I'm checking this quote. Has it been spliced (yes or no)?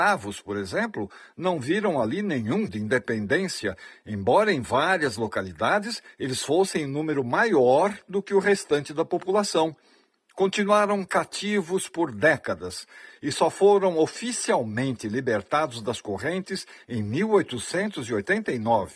yes